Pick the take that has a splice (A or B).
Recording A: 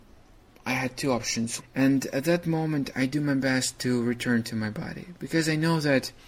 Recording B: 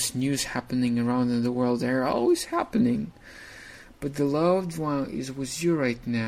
A